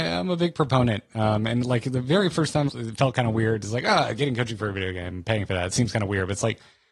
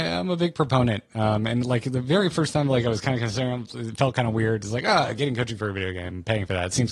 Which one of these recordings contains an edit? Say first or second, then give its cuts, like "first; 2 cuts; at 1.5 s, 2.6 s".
first; 1 cut; at 2.7 s